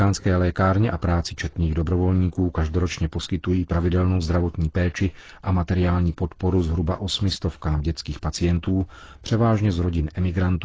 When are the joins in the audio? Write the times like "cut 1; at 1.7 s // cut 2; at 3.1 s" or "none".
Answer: none